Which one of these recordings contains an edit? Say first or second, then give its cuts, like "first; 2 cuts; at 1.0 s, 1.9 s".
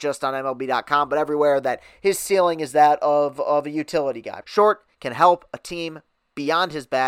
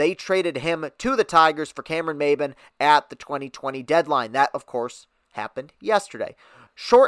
first; 1 cut; at 4.4 s